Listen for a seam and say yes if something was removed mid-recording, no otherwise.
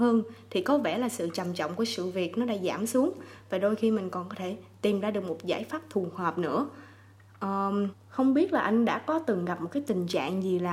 yes